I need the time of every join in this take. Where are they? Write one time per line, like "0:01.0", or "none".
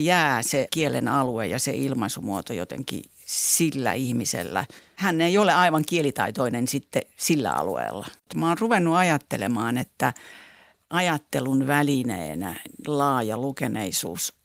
none